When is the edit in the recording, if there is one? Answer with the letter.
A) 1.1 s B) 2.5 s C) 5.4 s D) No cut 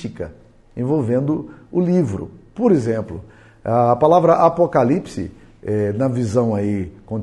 D